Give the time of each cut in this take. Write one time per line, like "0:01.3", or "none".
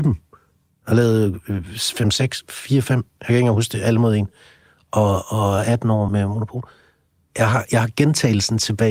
0:06.1